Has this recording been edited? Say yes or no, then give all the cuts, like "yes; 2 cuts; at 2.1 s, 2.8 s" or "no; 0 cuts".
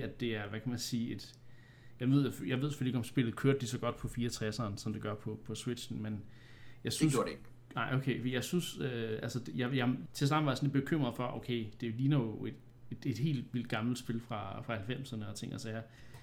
yes; 1 cut; at 10.1 s